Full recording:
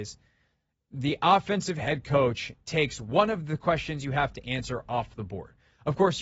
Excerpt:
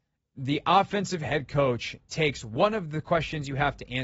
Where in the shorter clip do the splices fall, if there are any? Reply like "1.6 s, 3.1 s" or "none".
none